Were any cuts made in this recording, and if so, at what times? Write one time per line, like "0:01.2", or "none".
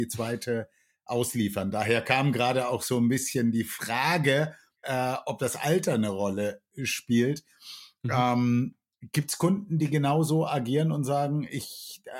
0:04.8